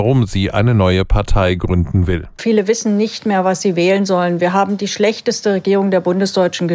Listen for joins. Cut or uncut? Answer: cut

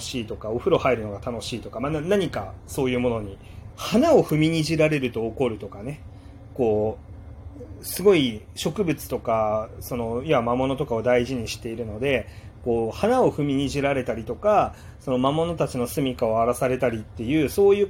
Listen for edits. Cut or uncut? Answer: cut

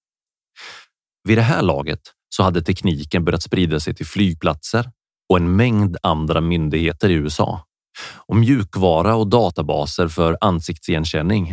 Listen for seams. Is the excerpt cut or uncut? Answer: uncut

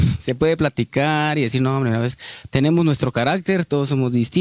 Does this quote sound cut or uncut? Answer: cut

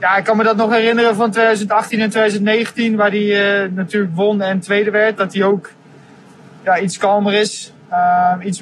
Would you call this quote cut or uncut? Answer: uncut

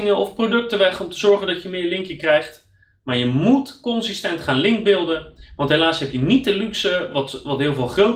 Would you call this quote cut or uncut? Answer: uncut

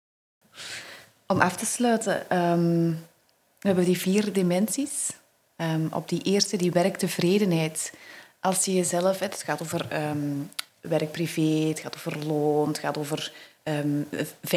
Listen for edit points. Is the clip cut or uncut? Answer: uncut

